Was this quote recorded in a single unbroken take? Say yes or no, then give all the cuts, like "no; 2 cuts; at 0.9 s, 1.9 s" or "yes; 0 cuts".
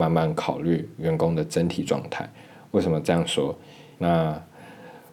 no; 1 cut; at 3.9 s